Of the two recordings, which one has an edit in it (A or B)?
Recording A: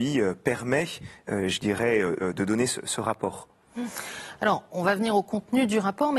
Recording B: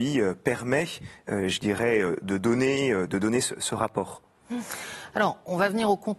A